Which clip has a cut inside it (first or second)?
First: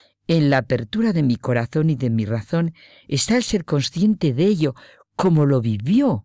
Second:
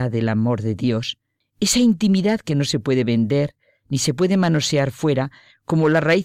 second